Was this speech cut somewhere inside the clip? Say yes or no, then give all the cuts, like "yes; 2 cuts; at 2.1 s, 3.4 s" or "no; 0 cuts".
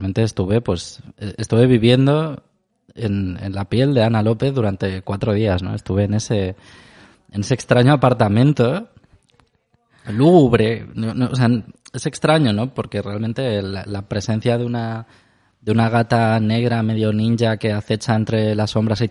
no; 0 cuts